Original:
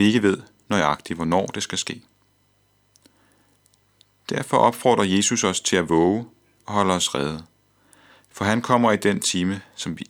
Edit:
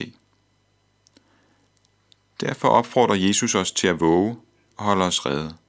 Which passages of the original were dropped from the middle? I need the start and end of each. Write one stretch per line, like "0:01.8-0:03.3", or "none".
none